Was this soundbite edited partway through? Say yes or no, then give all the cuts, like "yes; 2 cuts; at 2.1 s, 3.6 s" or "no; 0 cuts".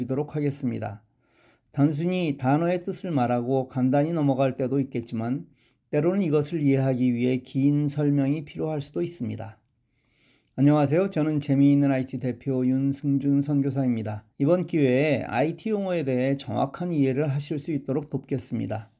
yes; 1 cut; at 14.3 s